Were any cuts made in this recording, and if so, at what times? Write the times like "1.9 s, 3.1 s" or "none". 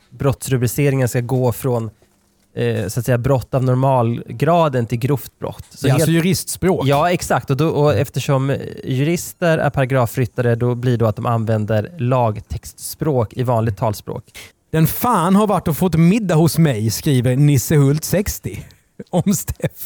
14.5 s